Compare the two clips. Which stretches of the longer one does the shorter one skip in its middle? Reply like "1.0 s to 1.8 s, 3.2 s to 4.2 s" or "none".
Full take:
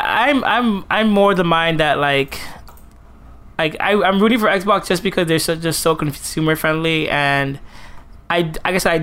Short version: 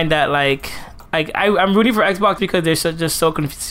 2.7 s to 3.5 s, 4.8 s to 5.0 s